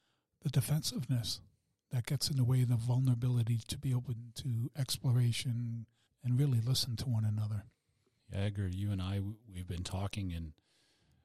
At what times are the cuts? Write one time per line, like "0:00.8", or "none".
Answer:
0:06.1
0:08.2